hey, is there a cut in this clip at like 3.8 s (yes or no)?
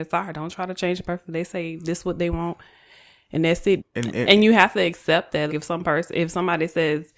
yes